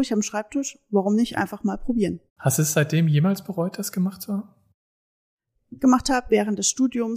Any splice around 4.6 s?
no; 2 cuts; at 2.3 s, 5.8 s

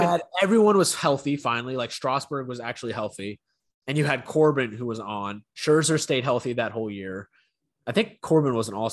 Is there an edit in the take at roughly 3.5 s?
no; 0 cuts

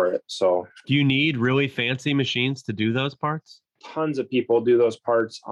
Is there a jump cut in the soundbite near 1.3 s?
no; 1 cut; at 3.7 s

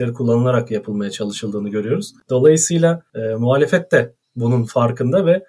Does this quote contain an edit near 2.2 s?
no; 0 cuts

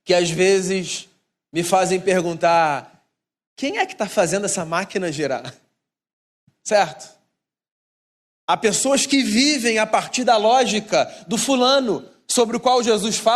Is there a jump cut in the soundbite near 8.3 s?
yes; 1 cut; at 8.3 s

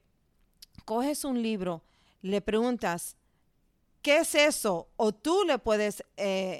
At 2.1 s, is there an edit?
yes; 1 cut; at 2.1 s

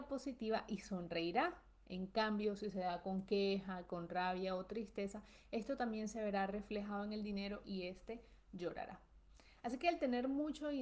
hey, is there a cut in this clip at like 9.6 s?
no; 0 cuts

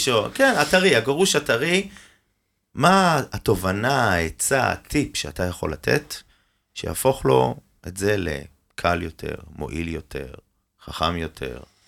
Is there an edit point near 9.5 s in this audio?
no; 0 cuts

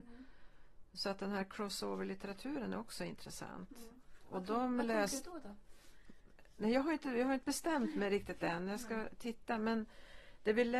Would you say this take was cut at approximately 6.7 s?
no; 0 cuts

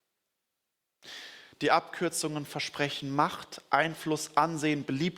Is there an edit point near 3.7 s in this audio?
no; 1 cut; at 1.5 s

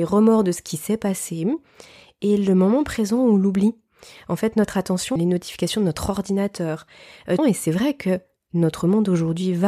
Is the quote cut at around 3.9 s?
no; 2 cuts; at 5.2 s, 7.4 s

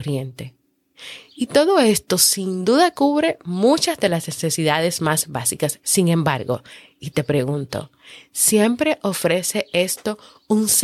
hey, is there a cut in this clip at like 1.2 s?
no; 0 cuts

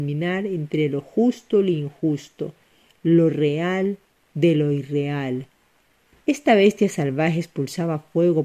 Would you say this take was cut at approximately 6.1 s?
yes; 1 cut; at 6.1 s

